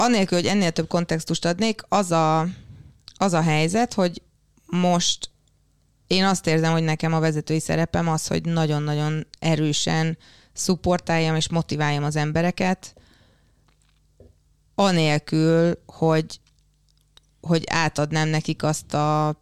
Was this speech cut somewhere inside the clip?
no; 0 cuts

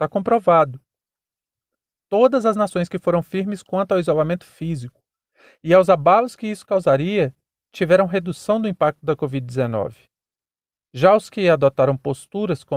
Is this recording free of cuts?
yes; 0 cuts

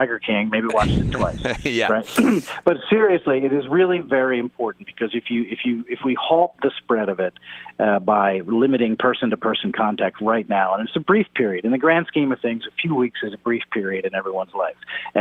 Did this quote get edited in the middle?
no; 0 cuts

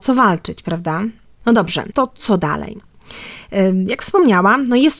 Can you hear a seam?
yes; 1 cut; at 1.9 s

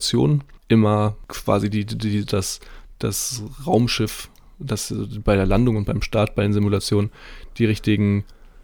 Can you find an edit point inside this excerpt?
yes; 1 cut; at 2.3 s

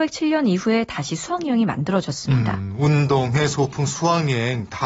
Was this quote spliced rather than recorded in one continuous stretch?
no; 0 cuts

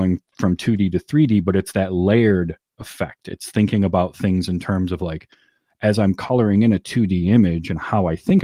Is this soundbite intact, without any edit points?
yes; 0 cuts

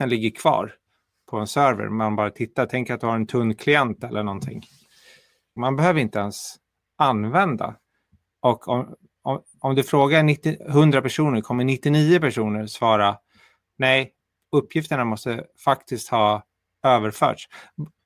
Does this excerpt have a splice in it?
yes; 2 cuts; at 5.6 s, 8.2 s

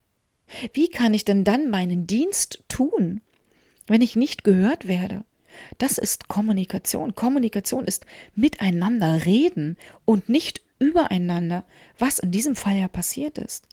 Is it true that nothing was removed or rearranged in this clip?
yes; 0 cuts

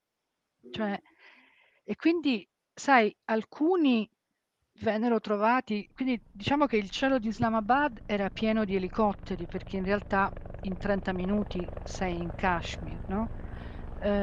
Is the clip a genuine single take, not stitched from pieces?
yes; 0 cuts

